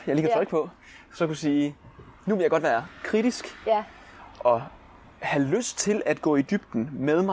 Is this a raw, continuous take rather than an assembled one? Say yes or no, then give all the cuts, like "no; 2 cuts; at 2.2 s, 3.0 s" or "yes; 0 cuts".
yes; 0 cuts